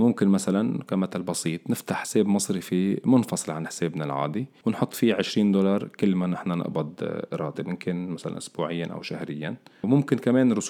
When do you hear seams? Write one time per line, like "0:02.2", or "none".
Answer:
none